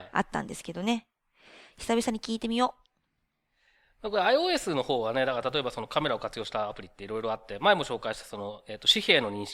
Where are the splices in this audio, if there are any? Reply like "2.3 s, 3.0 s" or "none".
none